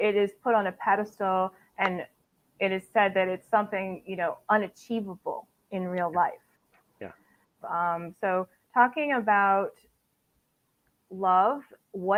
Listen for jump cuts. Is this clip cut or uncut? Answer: cut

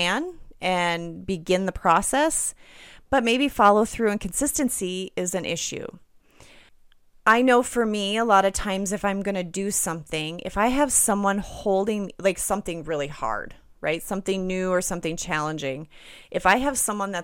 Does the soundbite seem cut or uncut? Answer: uncut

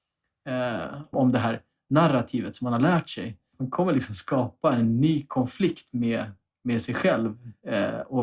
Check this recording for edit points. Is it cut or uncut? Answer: cut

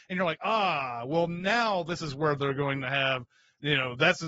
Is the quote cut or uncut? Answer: uncut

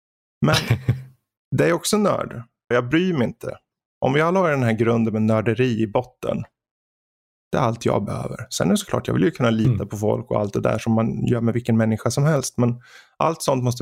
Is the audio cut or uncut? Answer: cut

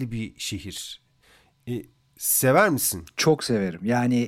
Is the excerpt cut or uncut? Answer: uncut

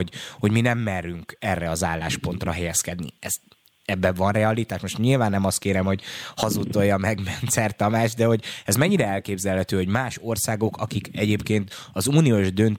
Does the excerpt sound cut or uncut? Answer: uncut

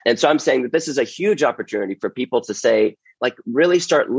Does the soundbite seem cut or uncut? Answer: cut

